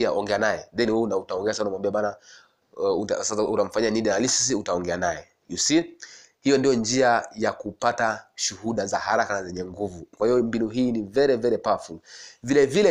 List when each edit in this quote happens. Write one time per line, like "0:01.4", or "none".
0:10.1